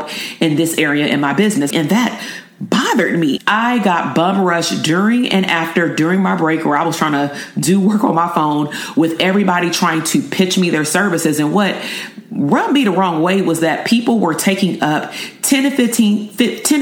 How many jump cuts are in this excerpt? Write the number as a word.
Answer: two